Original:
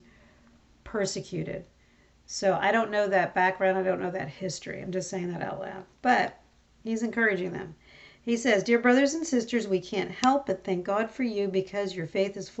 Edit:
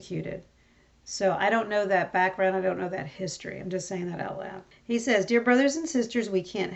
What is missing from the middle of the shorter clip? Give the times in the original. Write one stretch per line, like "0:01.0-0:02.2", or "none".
0:05.9-0:08.1